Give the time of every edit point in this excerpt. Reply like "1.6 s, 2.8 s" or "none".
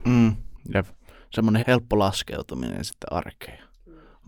1.6 s